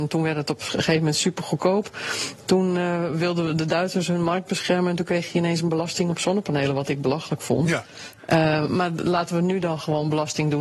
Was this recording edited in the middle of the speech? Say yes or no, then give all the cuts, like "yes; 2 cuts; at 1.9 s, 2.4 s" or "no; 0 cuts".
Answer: no; 0 cuts